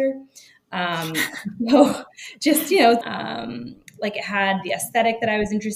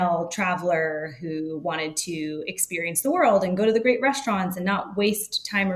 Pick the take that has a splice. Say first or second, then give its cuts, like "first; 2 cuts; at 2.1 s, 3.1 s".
first; 1 cut; at 3.0 s